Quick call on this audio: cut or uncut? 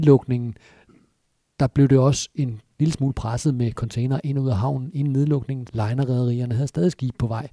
cut